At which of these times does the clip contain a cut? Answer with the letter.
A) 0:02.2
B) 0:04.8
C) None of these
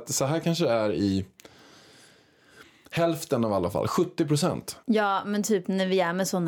B